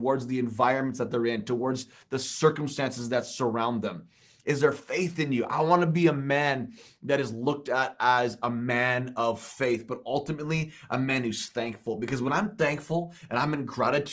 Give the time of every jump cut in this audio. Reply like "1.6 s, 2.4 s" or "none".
4.4 s